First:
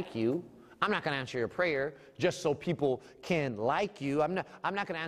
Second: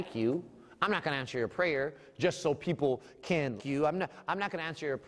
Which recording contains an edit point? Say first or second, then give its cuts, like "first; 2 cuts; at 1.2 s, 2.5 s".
second; 1 cut; at 3.6 s